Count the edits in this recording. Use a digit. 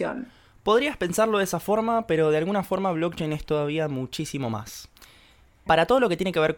1